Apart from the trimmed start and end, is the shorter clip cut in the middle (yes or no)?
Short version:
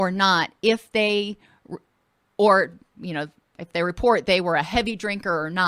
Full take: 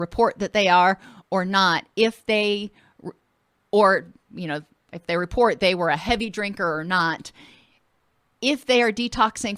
no